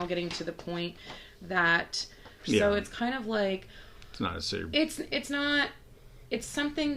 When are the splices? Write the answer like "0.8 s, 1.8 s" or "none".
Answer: 2.4 s